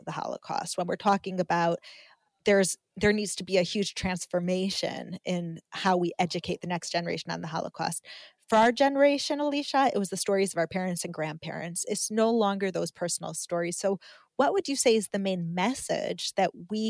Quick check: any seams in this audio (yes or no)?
no